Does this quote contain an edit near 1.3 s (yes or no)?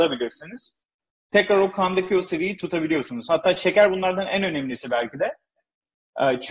yes